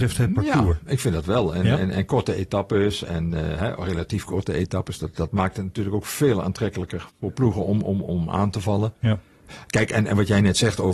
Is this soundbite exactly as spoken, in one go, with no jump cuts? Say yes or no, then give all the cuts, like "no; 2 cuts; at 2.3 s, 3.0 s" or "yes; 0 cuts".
yes; 0 cuts